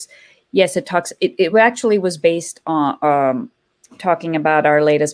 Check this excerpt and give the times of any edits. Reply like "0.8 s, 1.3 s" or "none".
none